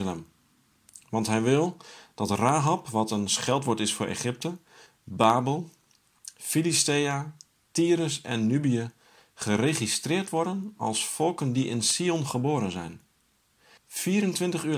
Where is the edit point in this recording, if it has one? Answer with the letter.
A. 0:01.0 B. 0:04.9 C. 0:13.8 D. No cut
C